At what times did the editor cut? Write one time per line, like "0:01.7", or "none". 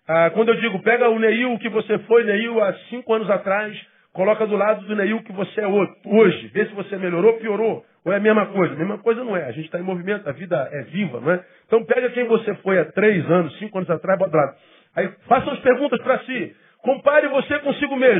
none